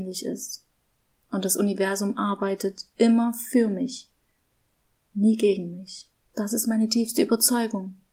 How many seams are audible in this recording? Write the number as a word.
one